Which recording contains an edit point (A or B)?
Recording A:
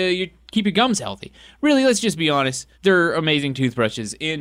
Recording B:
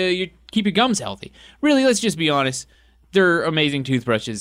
A